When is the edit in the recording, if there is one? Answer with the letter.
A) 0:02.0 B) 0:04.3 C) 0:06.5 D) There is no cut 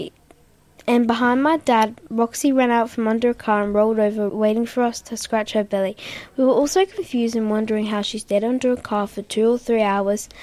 B